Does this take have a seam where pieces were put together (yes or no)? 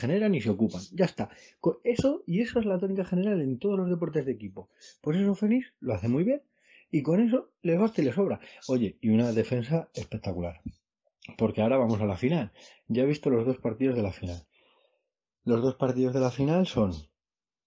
no